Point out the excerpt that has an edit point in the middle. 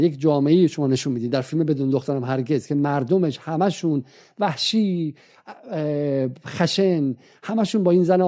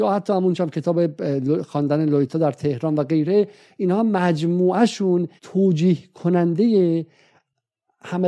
second; 1 cut; at 5.4 s

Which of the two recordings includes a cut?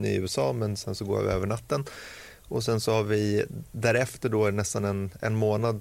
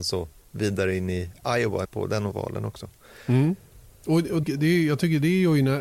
second; 2 cuts; at 1.8 s, 4.4 s

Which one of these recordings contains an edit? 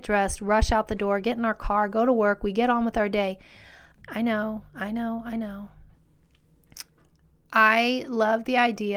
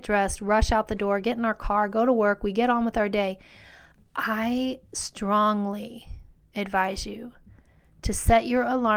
first; 2 cuts; at 4.0 s, 5.9 s

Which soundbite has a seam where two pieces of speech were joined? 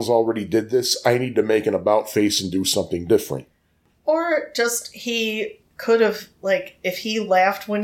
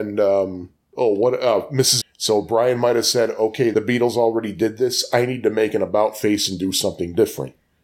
second; 1 cut; at 2.0 s

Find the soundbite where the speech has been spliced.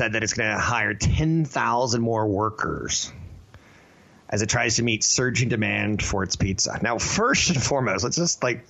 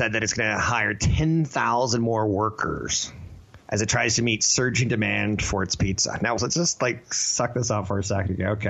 second; 2 cuts; at 3.6 s, 6.4 s

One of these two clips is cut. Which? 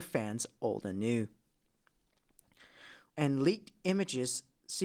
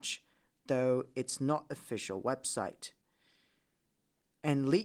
first; 1 cut; at 3.1 s

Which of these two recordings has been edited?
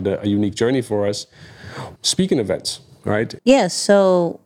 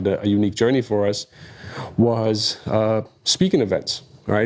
first; 2 cuts; at 2.0 s, 3.4 s

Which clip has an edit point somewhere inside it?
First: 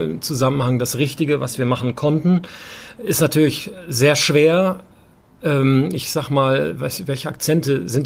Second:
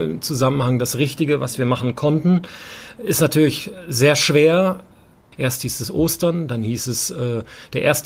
second; 1 cut; at 5.3 s

